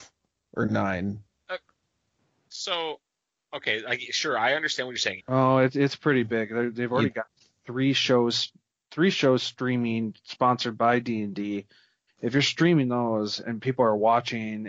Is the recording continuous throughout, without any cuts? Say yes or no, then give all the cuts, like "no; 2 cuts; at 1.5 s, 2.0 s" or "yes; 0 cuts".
no; 2 cuts; at 5.2 s, 12.1 s